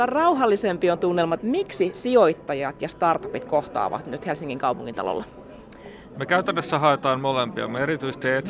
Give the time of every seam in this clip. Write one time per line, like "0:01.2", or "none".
0:01.4
0:06.1